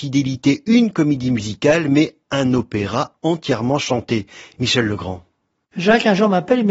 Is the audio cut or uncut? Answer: uncut